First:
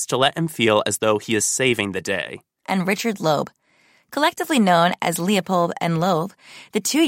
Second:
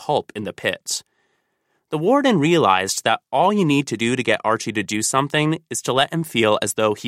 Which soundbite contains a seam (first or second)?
first